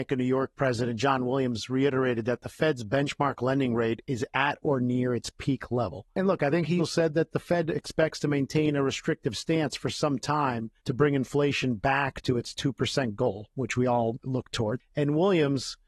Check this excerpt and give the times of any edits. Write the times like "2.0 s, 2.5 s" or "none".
6.8 s, 10.8 s